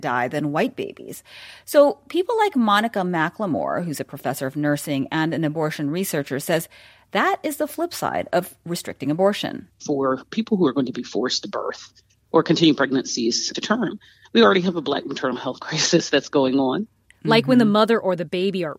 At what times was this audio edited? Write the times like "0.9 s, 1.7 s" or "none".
17.1 s